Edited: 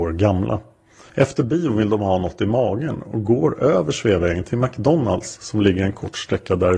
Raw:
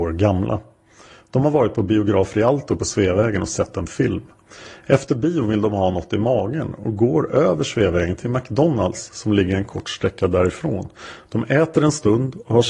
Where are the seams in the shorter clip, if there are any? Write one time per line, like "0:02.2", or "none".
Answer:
0:01.1